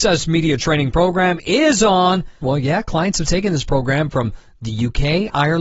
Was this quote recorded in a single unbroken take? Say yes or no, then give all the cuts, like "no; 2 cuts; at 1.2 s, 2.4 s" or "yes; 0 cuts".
no; 1 cut; at 2.4 s